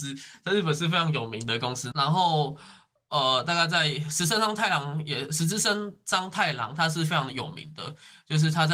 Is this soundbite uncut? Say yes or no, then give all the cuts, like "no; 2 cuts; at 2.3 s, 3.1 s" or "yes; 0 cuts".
no; 1 cut; at 1.9 s